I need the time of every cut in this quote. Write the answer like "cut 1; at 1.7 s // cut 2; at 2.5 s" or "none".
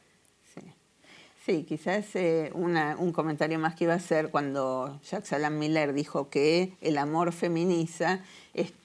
none